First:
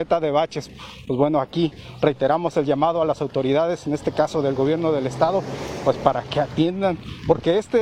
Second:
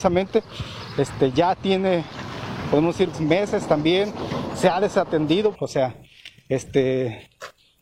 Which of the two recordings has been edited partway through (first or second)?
second